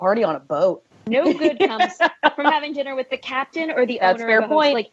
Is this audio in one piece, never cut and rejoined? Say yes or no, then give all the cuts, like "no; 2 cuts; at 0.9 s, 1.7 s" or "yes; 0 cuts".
no; 1 cut; at 0.9 s